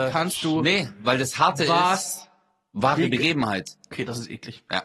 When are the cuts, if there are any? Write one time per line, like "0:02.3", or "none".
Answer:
0:03.9